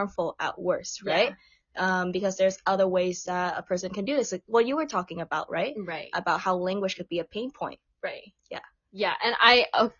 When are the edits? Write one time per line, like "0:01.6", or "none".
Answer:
none